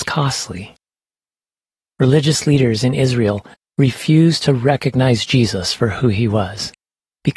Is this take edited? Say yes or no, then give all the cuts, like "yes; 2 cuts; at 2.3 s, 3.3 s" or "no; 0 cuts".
no; 0 cuts